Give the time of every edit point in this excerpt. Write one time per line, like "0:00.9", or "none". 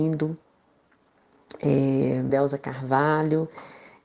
0:02.3